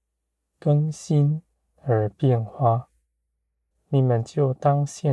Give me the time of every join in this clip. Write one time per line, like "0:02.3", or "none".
0:03.7